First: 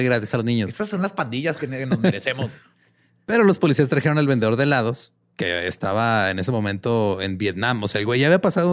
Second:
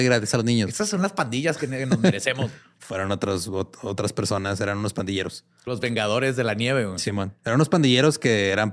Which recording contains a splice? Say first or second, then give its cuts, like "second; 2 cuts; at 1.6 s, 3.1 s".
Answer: second; 1 cut; at 2.8 s